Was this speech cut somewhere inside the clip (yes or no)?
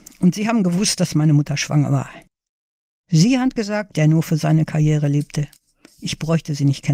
yes